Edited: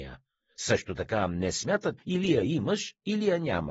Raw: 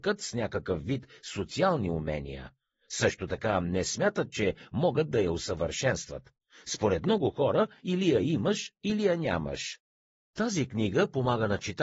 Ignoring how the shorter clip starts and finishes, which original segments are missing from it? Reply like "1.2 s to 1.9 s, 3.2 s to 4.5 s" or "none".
4.3 s to 7.8 s